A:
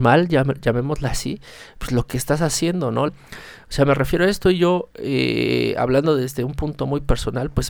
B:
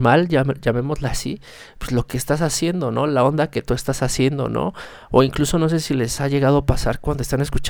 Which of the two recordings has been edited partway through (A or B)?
A